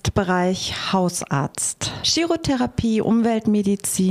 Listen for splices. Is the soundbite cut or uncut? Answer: cut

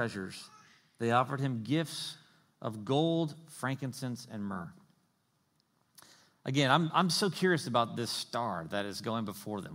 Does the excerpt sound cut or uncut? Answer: uncut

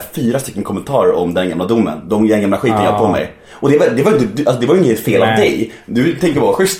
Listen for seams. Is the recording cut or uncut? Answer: uncut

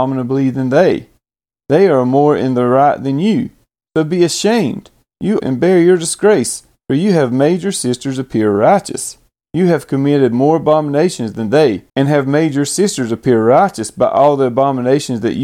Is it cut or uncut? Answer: cut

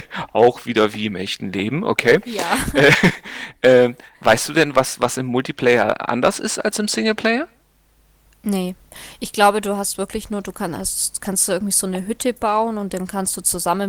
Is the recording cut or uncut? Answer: uncut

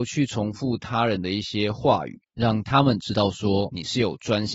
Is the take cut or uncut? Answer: uncut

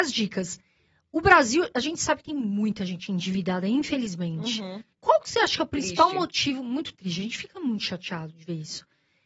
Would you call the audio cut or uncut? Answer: cut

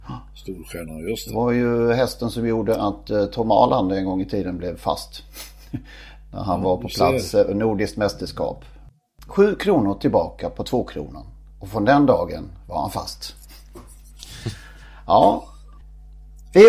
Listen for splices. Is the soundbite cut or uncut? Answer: uncut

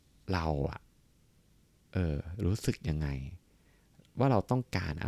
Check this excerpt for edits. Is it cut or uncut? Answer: uncut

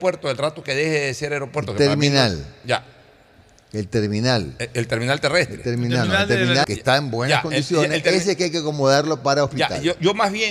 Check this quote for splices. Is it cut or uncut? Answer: cut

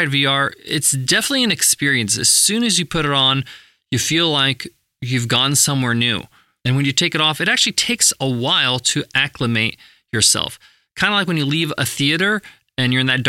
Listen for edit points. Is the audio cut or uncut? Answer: uncut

